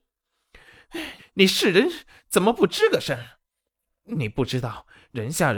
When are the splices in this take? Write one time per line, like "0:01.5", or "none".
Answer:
0:01.2